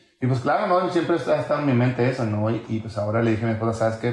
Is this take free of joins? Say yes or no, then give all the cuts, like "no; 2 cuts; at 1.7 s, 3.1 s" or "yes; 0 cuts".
yes; 0 cuts